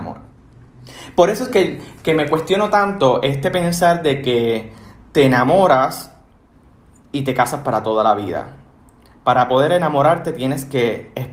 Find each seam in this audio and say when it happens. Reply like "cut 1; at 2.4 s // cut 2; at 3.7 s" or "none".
none